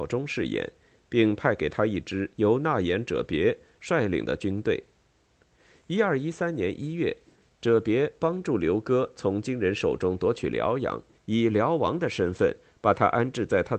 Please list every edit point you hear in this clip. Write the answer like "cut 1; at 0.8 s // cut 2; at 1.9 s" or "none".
cut 1; at 11.1 s